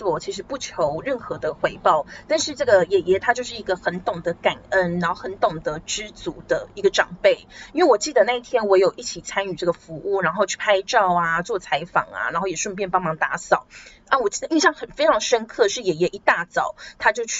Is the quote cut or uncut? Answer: uncut